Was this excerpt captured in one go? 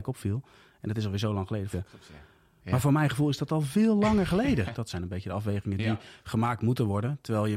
no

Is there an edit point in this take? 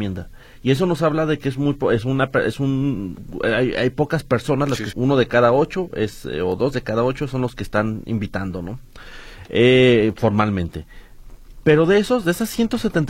yes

